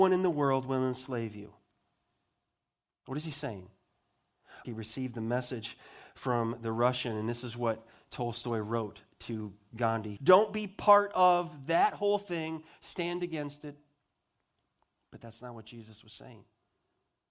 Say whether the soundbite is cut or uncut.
cut